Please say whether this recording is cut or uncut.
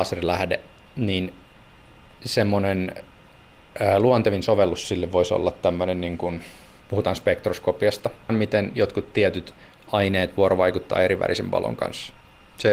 cut